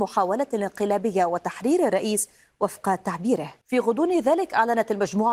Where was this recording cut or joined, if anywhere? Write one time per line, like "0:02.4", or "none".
0:03.6